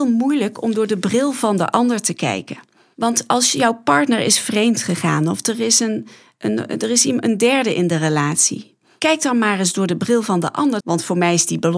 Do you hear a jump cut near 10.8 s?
yes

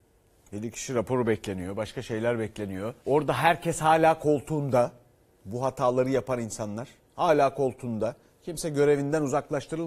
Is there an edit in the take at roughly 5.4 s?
no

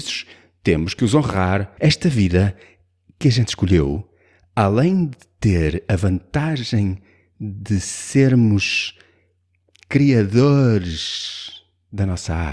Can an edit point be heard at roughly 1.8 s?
yes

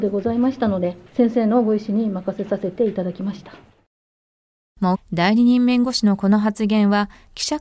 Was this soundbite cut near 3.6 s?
no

